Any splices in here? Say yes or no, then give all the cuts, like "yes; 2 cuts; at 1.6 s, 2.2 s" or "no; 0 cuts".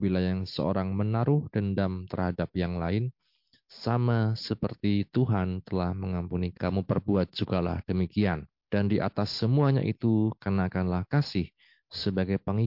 yes; 1 cut; at 6.5 s